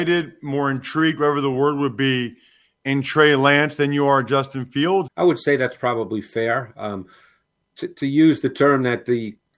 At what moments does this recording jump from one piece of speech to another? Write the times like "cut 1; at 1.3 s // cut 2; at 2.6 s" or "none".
cut 1; at 5.1 s // cut 2; at 7.7 s